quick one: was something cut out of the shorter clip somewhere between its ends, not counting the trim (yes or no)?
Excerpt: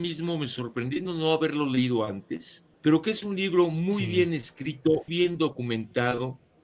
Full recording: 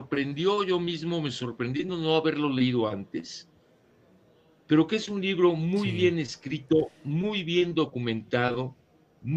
yes